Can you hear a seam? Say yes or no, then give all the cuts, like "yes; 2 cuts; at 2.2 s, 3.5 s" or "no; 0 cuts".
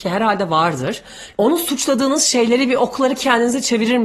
yes; 1 cut; at 1.3 s